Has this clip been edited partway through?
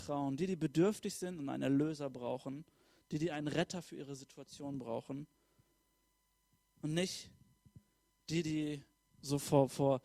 no; 0 cuts

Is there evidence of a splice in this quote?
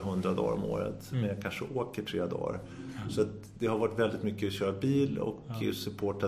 no; 0 cuts

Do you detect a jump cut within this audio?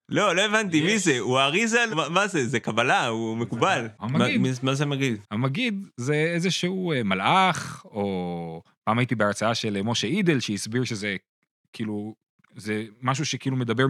yes; 2 cuts; at 1.9 s, 4.0 s

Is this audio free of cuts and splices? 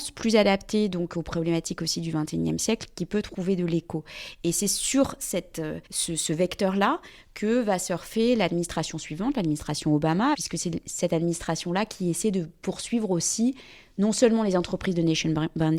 no; 2 cuts; at 5.9 s, 10.3 s

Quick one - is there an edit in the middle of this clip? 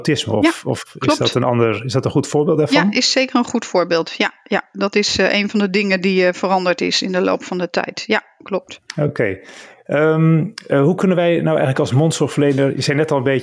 no; 0 cuts

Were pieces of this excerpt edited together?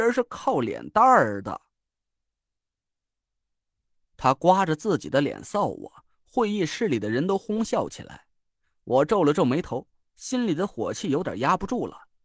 no; 0 cuts

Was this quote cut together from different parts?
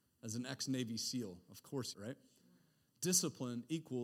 yes; 1 cut; at 1.9 s

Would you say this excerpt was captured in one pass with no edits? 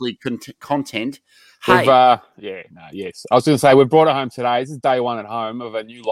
yes; 0 cuts

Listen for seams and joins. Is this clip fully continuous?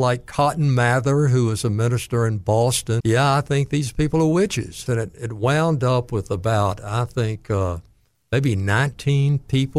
no; 2 cuts; at 3.0 s, 4.9 s

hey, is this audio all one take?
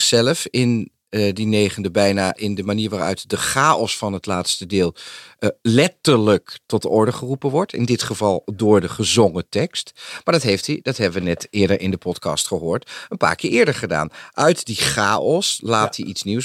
yes; 0 cuts

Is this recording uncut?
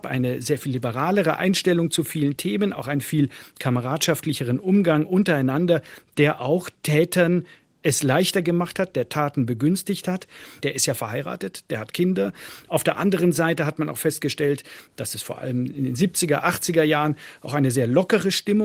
no; 1 cut; at 10.6 s

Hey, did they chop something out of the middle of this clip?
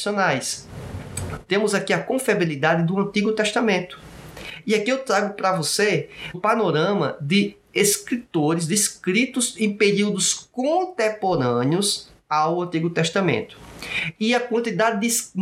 yes; 2 cuts; at 1.5 s, 6.3 s

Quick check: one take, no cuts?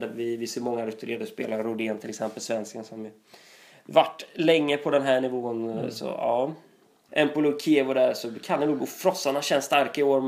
no; 1 cut; at 7.1 s

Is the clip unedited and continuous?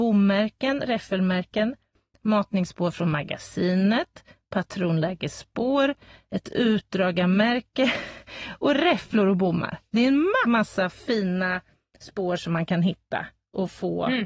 no; 1 cut; at 10.4 s

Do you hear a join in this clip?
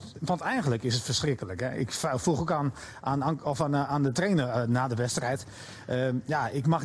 no; 0 cuts

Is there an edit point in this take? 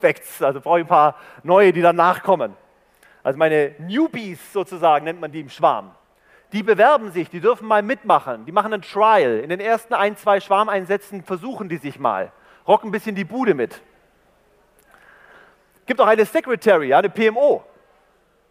no; 0 cuts

